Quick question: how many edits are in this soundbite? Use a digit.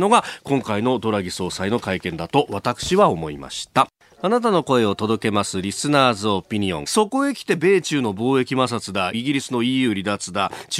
2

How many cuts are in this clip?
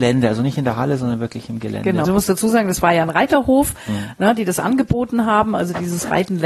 1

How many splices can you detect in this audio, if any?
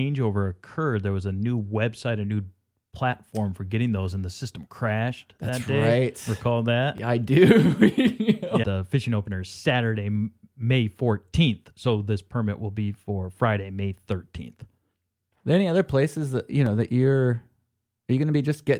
1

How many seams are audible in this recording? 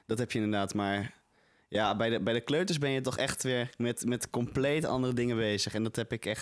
0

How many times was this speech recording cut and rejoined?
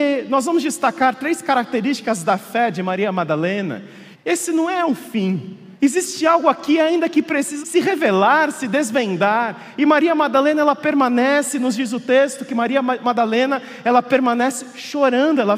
3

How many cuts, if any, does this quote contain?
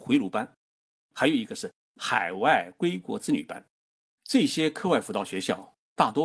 1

